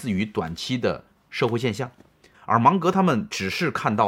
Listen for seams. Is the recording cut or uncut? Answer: cut